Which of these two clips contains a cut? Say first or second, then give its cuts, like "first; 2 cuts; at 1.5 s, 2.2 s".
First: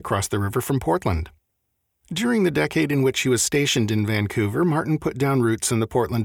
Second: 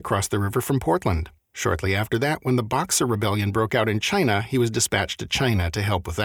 second; 1 cut; at 1.5 s